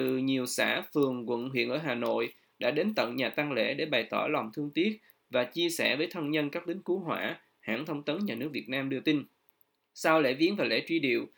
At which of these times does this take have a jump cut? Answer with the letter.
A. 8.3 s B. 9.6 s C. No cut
C